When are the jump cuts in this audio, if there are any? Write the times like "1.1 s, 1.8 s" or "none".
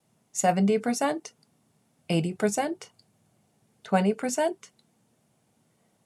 2.0 s